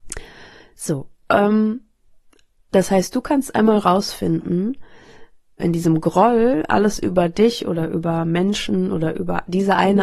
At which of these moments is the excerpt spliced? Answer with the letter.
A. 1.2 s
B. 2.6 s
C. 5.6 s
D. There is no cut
C